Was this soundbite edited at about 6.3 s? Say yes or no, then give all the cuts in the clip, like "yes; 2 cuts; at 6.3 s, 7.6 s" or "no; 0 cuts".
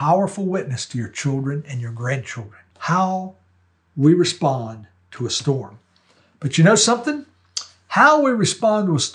no; 1 cut; at 2.7 s